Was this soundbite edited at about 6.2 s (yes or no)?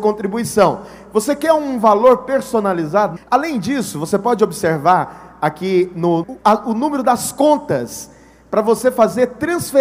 yes